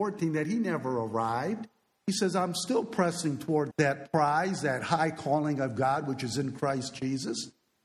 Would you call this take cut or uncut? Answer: cut